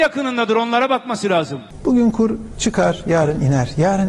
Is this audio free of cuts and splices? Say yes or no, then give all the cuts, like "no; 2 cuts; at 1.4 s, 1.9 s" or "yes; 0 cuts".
yes; 0 cuts